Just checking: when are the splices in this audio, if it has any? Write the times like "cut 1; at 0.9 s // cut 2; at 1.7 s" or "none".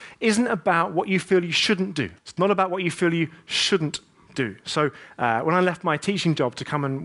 cut 1; at 2.2 s